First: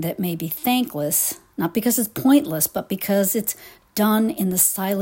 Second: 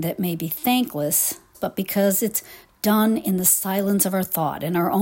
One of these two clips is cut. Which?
second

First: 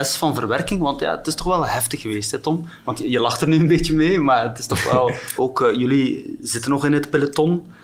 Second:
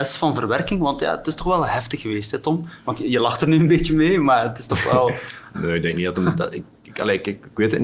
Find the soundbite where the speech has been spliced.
first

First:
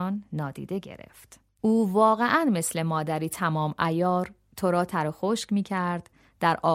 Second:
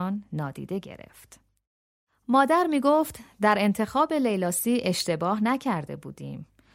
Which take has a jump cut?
first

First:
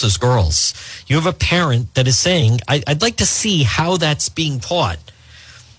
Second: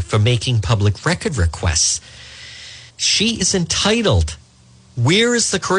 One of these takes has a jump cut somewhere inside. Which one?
second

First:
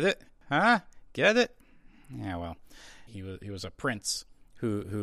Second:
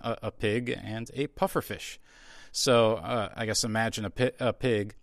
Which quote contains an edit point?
first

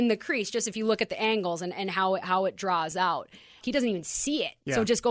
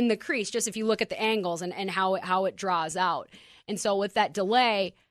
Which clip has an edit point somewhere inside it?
first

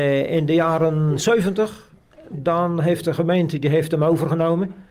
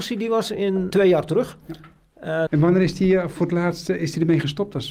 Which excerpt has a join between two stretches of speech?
second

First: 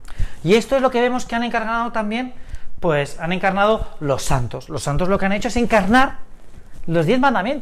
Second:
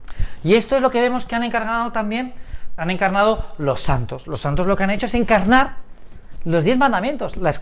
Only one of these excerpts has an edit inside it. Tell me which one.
second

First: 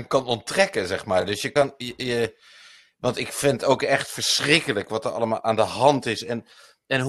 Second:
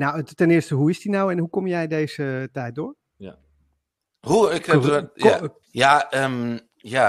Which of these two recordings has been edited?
second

